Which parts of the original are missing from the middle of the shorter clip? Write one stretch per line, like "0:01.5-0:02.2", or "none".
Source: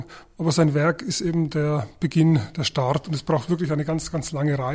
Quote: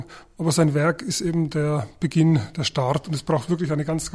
none